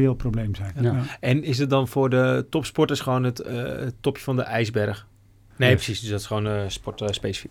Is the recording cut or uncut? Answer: cut